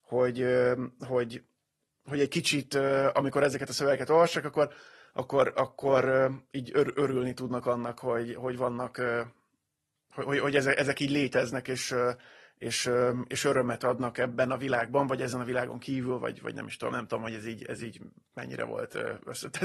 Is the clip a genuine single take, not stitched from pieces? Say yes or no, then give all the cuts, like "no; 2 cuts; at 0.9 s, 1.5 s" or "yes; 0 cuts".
yes; 0 cuts